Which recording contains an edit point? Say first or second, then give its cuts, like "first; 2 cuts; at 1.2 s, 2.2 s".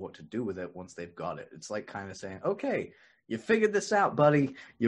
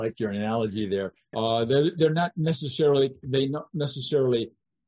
second; 1 cut; at 1.3 s